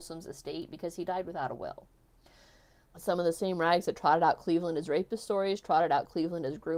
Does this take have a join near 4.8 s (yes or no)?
no